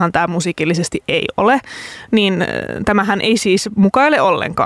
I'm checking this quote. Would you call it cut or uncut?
uncut